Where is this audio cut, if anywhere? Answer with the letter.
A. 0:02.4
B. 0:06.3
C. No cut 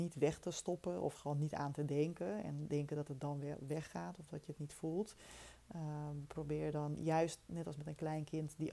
C